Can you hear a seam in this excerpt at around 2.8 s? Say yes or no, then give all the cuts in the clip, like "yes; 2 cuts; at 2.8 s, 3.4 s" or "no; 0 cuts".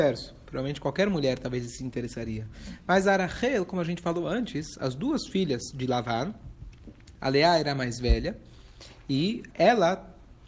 no; 2 cuts; at 7.2 s, 9.5 s